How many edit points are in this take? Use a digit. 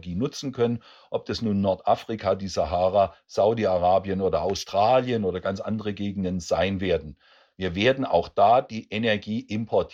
0